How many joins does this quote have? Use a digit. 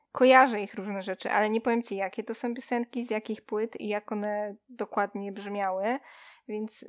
0